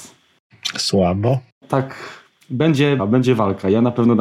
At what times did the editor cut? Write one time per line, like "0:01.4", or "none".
0:03.0